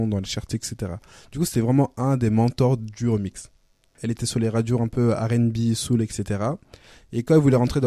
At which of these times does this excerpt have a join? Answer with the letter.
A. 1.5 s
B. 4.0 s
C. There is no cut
B